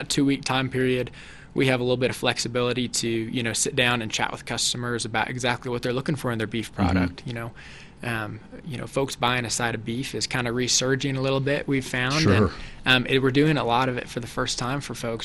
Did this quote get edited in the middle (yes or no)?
no